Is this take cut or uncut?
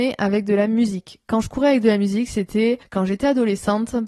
uncut